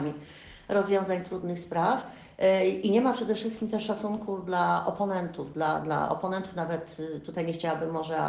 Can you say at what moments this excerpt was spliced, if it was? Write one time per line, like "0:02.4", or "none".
0:05.8